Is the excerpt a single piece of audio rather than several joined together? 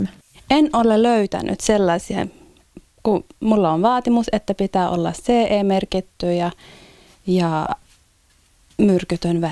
yes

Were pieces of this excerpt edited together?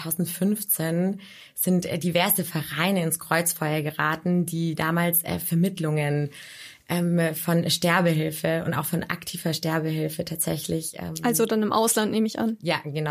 no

